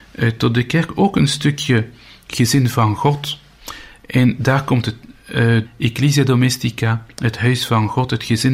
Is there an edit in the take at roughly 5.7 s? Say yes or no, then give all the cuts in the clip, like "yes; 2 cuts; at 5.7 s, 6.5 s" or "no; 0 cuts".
yes; 1 cut; at 5.7 s